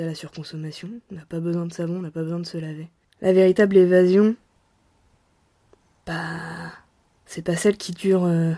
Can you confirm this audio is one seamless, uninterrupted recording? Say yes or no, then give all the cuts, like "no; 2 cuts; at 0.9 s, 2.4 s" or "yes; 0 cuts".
no; 1 cut; at 3.0 s